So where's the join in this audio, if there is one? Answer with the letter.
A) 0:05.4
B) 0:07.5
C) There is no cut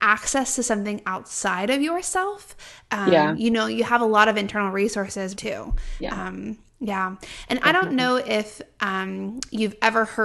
A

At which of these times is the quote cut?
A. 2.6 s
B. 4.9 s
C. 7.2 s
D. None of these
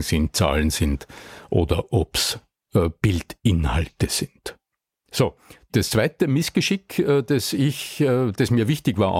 B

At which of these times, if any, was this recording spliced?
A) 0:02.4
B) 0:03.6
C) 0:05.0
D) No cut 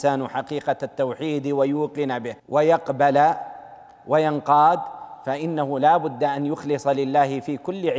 A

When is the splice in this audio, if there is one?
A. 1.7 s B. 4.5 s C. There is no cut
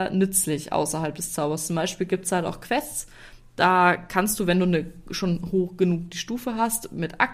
C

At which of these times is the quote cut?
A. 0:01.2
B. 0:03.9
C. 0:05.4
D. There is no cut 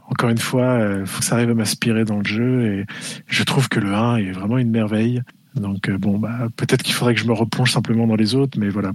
A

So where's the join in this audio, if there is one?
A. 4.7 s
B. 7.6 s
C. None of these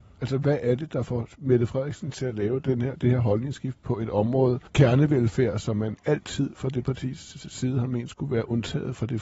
A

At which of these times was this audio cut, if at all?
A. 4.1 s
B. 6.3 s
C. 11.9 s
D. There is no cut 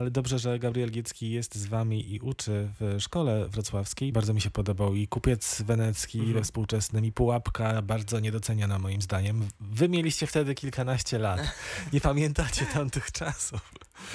A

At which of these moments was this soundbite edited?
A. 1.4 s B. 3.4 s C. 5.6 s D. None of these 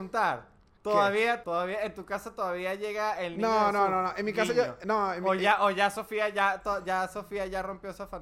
A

